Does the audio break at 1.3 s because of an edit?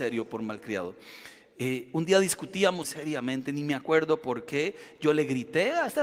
no; 1 cut; at 2.8 s

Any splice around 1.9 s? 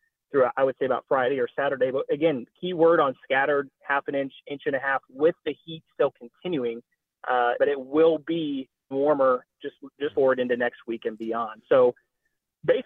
no; 3 cuts; at 7.6 s, 8.9 s, 10.1 s

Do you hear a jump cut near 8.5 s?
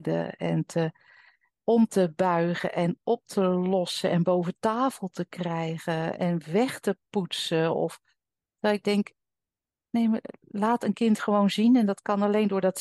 no; 1 cut; at 6.2 s

